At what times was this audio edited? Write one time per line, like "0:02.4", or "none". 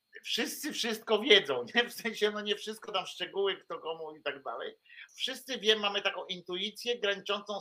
0:05.1